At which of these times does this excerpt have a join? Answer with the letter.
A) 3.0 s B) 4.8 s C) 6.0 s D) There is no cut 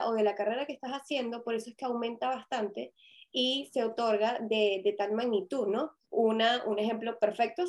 C